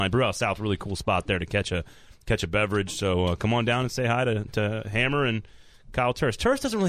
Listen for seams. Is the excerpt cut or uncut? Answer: uncut